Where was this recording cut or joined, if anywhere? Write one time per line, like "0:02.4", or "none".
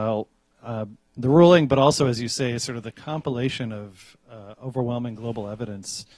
none